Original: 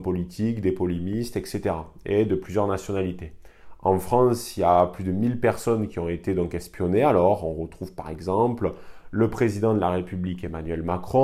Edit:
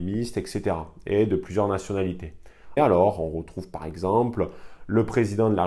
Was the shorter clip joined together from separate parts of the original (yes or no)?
yes